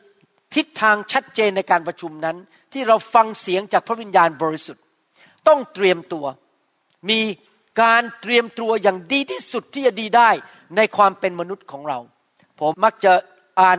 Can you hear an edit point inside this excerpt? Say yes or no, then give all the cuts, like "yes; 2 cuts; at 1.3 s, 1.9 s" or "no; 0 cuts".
yes; 1 cut; at 12.7 s